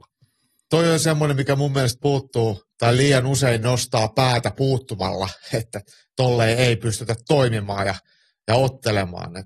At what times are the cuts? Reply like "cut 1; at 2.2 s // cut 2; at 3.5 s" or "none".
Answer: none